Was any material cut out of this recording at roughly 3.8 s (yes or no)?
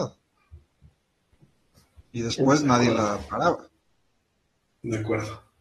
no